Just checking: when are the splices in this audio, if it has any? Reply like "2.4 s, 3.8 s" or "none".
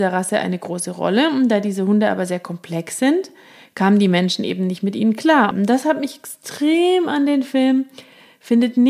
5.5 s